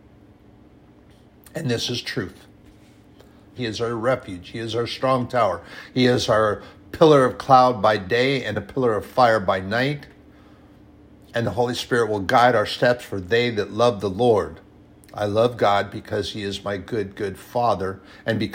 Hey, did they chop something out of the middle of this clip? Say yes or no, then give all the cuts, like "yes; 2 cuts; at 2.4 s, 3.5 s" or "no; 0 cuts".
yes; 1 cut; at 3.6 s